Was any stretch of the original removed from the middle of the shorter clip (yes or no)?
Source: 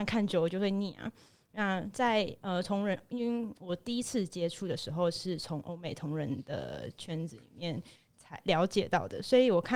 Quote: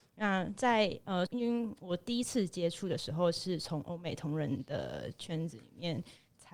yes